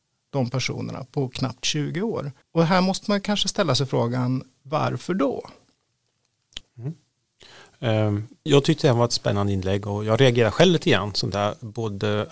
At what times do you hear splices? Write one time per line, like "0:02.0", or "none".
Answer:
0:02.4
0:06.6
0:08.5